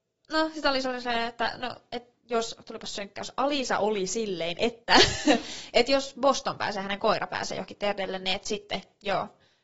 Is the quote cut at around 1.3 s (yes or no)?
no